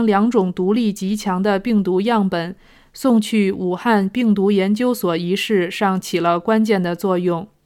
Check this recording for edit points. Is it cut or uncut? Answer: uncut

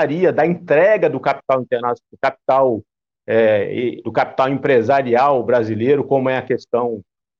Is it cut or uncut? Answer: cut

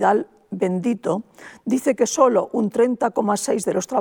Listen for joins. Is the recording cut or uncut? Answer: uncut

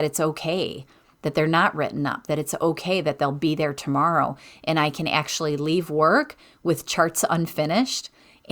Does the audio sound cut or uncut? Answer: uncut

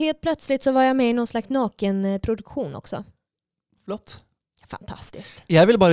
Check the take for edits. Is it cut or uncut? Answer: uncut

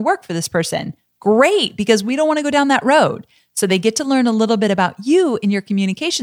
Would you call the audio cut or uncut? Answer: uncut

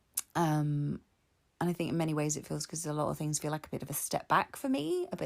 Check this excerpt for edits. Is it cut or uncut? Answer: uncut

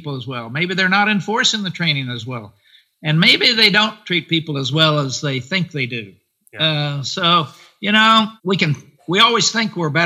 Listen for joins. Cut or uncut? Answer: cut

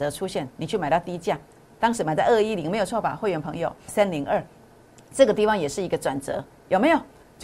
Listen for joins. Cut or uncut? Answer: cut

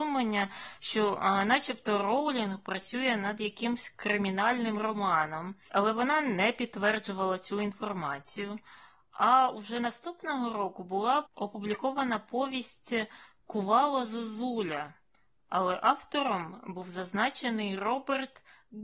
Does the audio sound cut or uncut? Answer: uncut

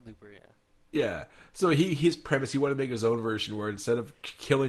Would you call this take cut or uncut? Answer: uncut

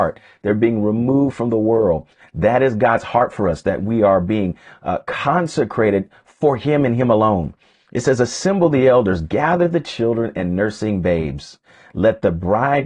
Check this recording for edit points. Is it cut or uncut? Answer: uncut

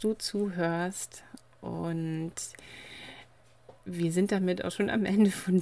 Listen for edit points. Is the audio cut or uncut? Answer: uncut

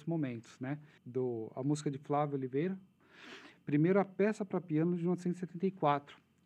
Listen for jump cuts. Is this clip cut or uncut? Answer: cut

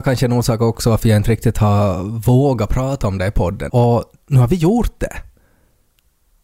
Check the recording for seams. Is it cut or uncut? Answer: cut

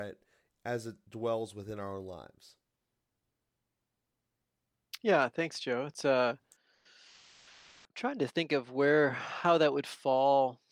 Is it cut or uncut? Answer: uncut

